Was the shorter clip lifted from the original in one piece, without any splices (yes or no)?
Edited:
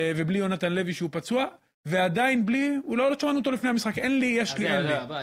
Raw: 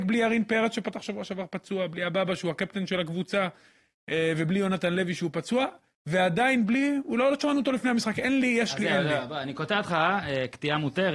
yes